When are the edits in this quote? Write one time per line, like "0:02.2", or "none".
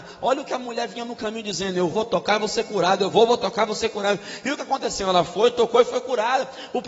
0:01.9